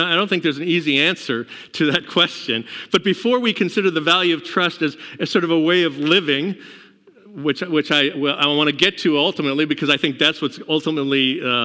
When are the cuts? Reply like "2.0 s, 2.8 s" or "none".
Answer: none